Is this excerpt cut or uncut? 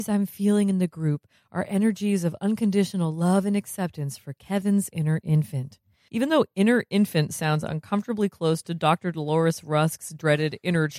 cut